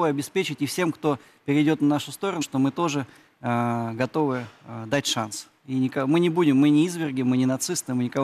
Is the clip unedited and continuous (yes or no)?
no